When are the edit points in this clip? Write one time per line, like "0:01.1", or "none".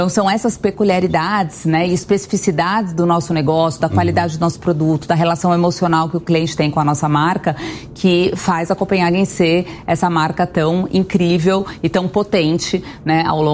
0:03.8